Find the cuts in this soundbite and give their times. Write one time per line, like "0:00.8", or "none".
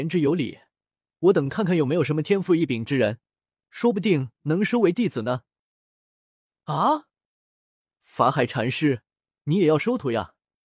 none